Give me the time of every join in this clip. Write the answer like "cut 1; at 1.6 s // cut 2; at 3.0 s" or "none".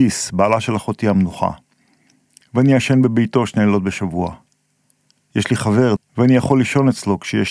cut 1; at 6.0 s